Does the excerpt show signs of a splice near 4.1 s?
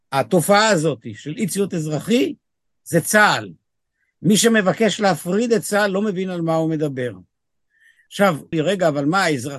no; 1 cut; at 8.5 s

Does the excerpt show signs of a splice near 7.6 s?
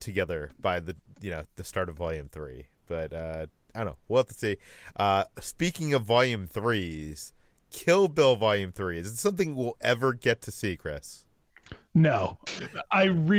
no; 1 cut; at 12.5 s

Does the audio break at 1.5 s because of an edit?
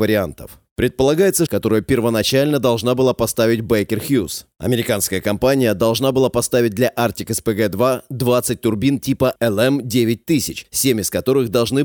yes; 1 cut; at 1.5 s

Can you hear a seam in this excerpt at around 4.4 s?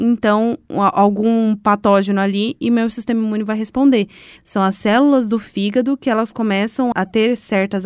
yes; 2 cuts; at 4.4 s, 6.9 s

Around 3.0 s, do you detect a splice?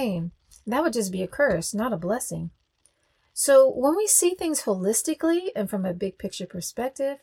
no; 0 cuts

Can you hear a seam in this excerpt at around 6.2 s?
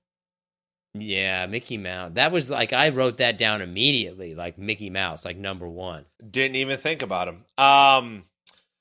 yes; 1 cut; at 6.2 s

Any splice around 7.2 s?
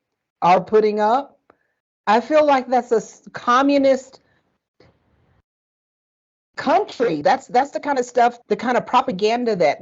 yes; 2 cuts; at 7.2 s, 8.4 s

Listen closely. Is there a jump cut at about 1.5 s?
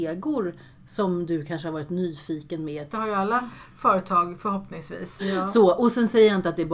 no; 2 cuts; at 2.9 s, 5.2 s

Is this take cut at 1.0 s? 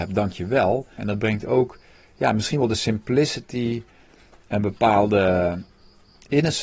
yes; 1 cut; at 1.0 s

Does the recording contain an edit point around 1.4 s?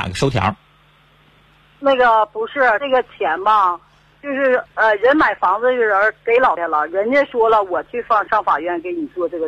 no; 2 cuts; at 2.8 s, 6.6 s

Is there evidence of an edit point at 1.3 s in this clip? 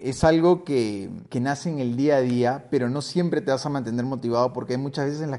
yes; 1 cut; at 1.3 s

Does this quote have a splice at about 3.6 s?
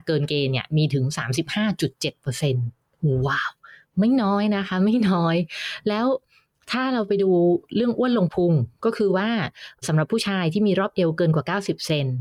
no; 0 cuts

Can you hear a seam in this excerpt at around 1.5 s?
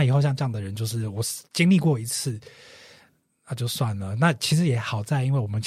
yes; 1 cut; at 1.5 s

